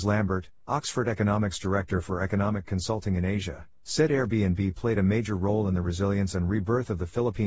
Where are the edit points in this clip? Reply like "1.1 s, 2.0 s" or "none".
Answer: none